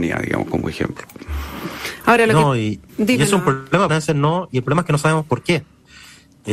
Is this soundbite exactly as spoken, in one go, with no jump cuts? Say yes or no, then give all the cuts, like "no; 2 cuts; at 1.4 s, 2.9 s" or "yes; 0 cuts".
no; 2 cuts; at 2.9 s, 3.9 s